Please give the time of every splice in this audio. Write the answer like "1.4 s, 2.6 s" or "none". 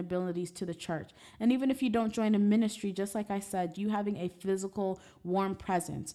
3.7 s